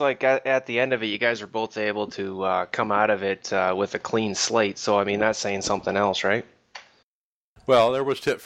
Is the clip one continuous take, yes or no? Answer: yes